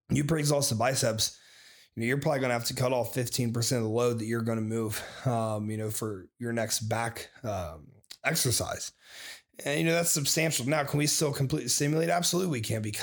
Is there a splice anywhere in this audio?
no; 0 cuts

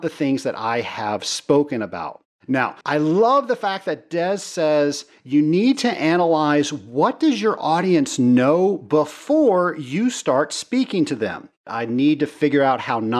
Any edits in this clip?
yes; 2 cuts; at 2.8 s, 11.7 s

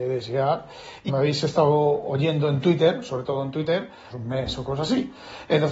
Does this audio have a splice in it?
yes; 2 cuts; at 1.1 s, 4.1 s

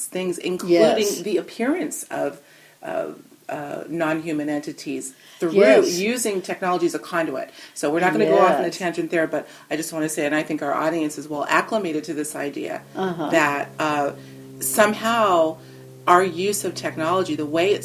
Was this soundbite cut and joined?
no; 0 cuts

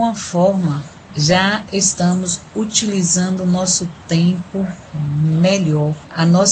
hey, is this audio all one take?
yes; 0 cuts

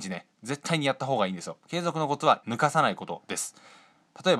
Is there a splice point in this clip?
yes; 1 cut; at 2.4 s

